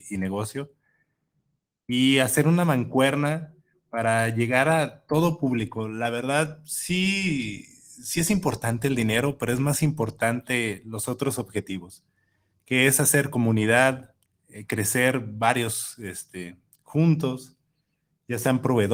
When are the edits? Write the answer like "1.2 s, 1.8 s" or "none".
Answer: none